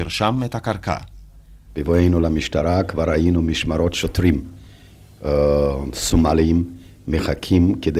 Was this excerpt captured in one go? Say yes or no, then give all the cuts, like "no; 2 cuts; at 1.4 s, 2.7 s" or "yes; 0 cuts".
no; 1 cut; at 1.7 s